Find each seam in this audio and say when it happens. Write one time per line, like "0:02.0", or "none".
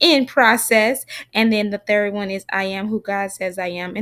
none

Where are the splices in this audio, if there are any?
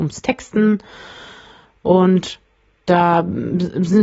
none

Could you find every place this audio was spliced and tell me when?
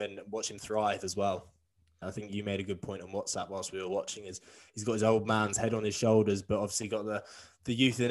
0:02.0

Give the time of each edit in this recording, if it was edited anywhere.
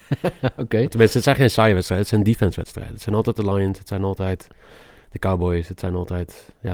none

